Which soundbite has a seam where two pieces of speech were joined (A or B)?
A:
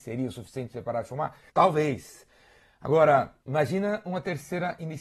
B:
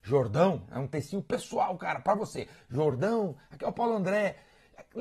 A